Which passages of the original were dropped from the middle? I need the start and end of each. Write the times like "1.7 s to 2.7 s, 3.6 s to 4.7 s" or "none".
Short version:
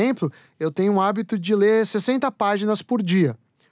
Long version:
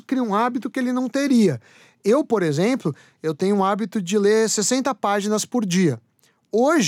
none